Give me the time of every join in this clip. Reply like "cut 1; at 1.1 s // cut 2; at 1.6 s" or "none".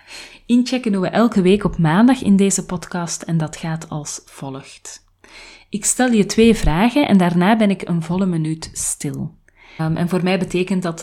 cut 1; at 9.8 s